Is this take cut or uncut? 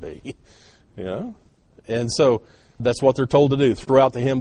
cut